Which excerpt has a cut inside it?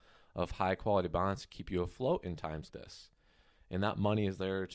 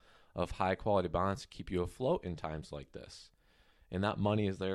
first; 1 cut; at 2.7 s

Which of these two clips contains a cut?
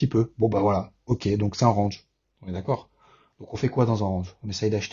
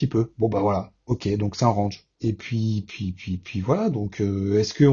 second; 1 cut; at 2.2 s

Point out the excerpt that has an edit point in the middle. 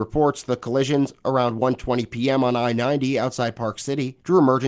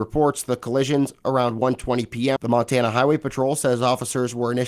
second; 1 cut; at 2.4 s

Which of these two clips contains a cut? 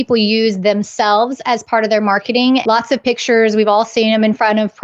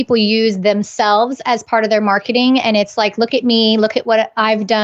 first; 1 cut; at 2.6 s

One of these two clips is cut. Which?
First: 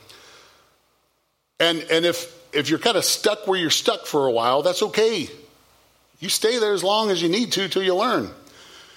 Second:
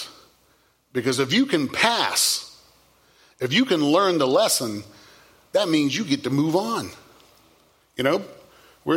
second; 1 cut; at 7.8 s

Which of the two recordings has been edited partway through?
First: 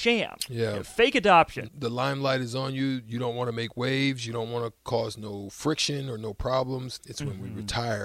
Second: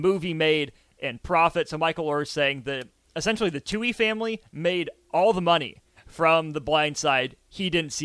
first; 2 cuts; at 1.7 s, 7.0 s

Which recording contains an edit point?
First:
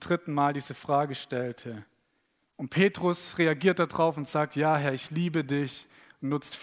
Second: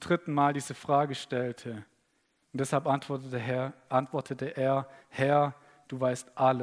first; 1 cut; at 2.5 s

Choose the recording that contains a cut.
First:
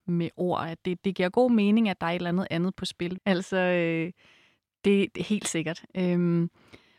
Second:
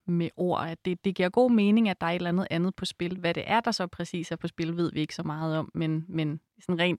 first; 2 cuts; at 3.2 s, 5.9 s

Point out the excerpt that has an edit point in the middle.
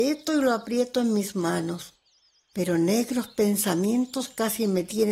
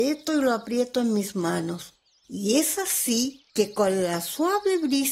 second; 2 cuts; at 2.2 s, 3.5 s

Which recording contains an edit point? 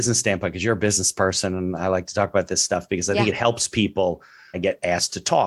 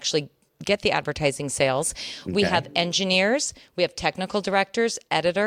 first; 1 cut; at 4.5 s

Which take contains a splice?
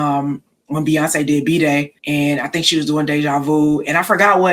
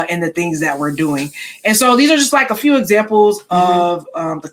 first; 1 cut; at 2.0 s

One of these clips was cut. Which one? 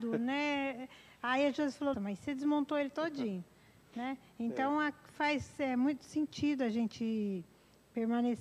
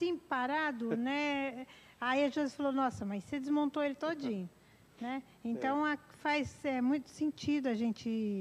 first; 1 cut; at 1.9 s

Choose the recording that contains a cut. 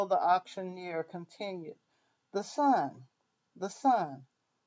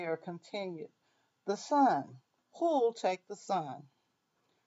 second; 1 cut; at 2.4 s

